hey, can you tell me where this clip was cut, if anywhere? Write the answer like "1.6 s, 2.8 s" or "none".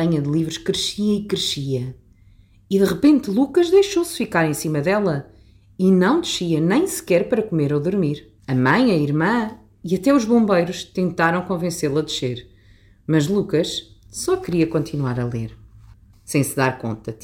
8.4 s, 16.1 s